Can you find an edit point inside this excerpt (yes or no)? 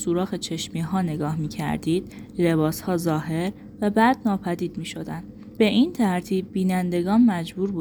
yes